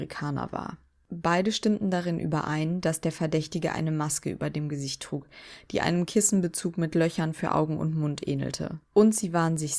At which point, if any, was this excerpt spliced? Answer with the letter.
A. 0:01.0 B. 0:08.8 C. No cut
B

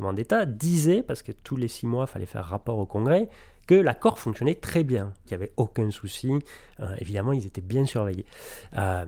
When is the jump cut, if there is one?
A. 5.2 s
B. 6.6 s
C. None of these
A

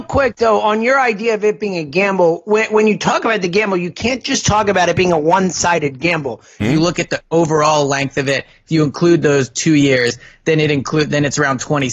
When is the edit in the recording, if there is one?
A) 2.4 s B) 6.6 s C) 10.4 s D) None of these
B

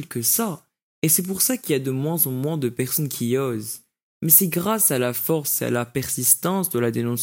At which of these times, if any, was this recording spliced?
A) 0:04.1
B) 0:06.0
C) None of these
C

